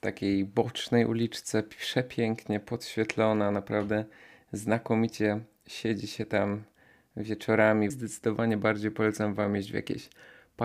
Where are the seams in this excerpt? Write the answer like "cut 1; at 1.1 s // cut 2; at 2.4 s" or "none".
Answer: cut 1; at 7.9 s